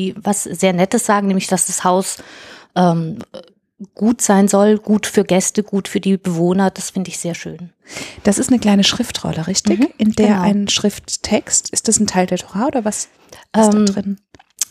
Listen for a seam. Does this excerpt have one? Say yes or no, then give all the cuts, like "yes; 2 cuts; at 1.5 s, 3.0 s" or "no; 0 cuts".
no; 0 cuts